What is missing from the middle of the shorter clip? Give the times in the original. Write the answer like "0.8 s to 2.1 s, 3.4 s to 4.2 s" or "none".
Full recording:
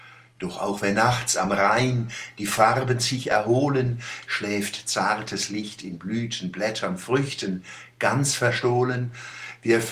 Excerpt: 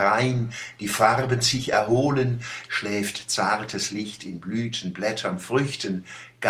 none